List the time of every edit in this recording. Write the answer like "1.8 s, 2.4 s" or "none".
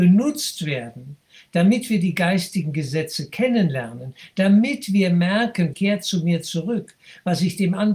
5.7 s